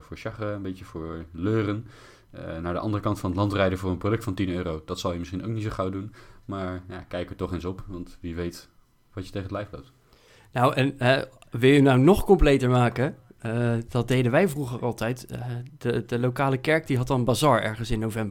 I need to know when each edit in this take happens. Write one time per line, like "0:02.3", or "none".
none